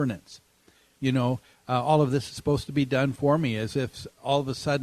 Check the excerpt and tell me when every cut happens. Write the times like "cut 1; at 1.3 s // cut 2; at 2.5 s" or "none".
cut 1; at 1.0 s